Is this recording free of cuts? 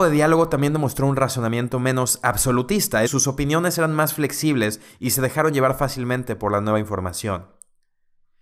no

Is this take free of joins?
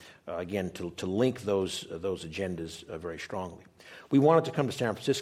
yes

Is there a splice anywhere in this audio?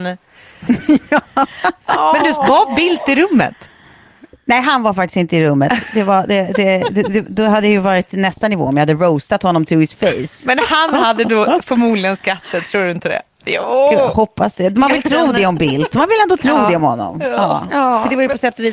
no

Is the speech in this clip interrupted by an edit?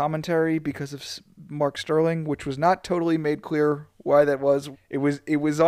yes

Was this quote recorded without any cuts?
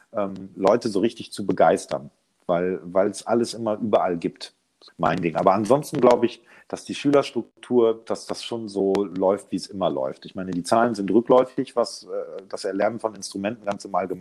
no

